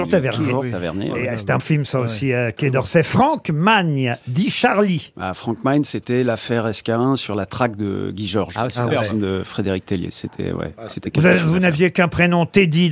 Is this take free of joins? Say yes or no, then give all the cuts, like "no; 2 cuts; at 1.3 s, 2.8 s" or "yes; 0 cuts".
no; 1 cut; at 1.6 s